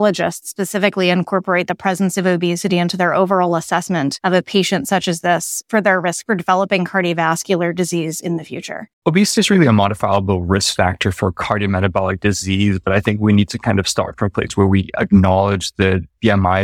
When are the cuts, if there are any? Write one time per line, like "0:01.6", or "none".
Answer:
0:09.0